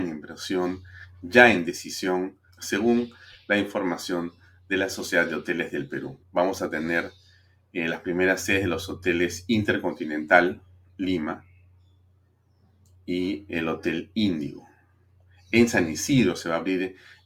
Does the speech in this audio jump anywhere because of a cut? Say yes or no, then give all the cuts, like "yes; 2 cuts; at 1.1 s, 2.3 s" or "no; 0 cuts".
yes; 2 cuts; at 2.5 s, 6.2 s